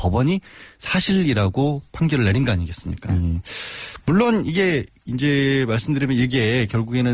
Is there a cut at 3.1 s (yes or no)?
yes